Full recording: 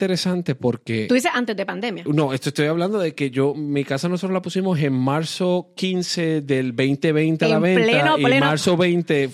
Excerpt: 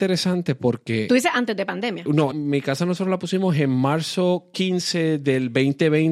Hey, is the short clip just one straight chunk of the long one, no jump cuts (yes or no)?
no